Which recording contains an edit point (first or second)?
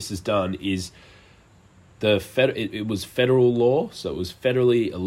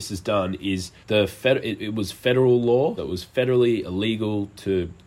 second